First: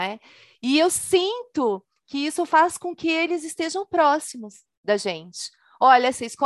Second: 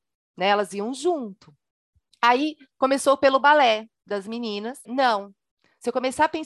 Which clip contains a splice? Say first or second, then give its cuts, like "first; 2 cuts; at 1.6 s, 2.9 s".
second; 1 cut; at 4.9 s